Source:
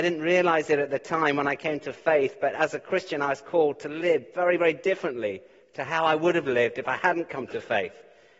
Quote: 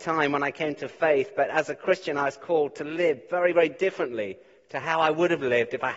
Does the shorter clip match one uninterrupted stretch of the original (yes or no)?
yes